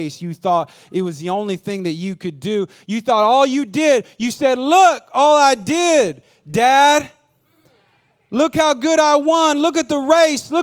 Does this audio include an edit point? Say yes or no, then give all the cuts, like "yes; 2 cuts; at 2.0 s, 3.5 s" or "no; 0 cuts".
no; 0 cuts